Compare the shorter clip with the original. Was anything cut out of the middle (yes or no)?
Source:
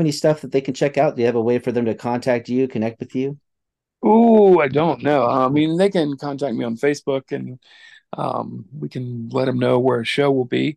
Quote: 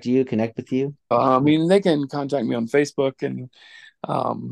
yes